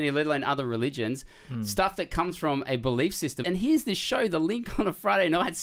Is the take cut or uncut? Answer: cut